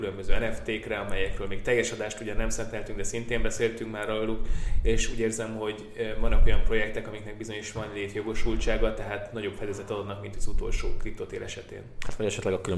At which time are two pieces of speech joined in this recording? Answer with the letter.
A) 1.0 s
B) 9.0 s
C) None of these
C